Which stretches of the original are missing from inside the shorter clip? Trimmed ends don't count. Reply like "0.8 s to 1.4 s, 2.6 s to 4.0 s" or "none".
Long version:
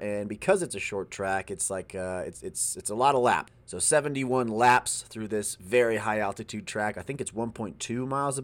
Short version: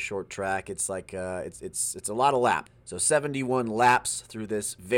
none